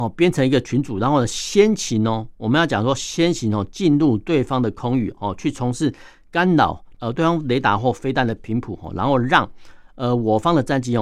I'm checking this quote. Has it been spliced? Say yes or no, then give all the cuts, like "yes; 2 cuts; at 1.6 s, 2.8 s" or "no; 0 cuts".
no; 0 cuts